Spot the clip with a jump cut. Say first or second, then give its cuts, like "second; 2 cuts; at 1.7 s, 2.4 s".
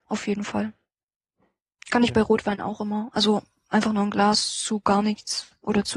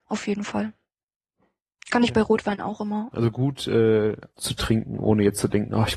second; 2 cuts; at 3.1 s, 4.3 s